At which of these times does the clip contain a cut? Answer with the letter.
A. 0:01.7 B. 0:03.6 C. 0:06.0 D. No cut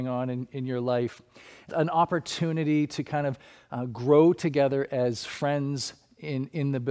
A